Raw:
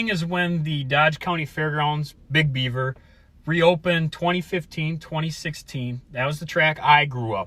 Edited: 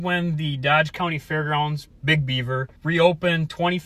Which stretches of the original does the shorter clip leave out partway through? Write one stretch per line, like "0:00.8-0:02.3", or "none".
0:03.0-0:03.4